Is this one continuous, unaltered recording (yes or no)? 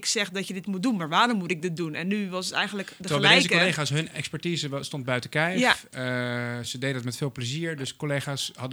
yes